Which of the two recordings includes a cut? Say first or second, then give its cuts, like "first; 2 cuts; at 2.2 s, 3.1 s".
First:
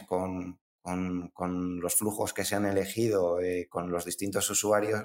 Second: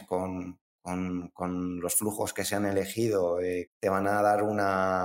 second; 1 cut; at 3.7 s